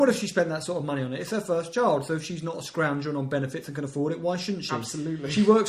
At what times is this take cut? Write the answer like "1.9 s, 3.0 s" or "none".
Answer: none